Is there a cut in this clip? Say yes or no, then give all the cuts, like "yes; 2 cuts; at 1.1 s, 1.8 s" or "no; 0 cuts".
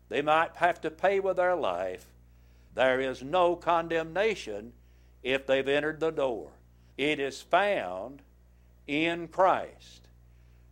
yes; 2 cuts; at 2.7 s, 6.9 s